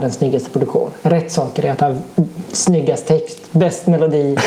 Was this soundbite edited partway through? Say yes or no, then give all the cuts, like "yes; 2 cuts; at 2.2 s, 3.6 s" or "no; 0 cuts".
no; 0 cuts